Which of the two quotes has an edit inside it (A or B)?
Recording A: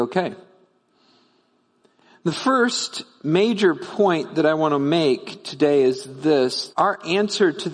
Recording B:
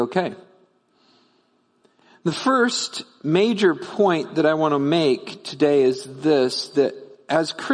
A